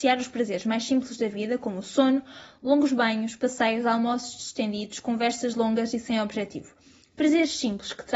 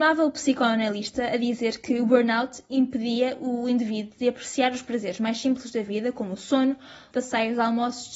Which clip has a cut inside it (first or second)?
second